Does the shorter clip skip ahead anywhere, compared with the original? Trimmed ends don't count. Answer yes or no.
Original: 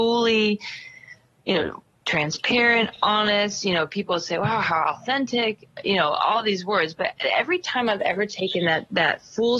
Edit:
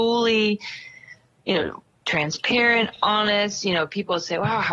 no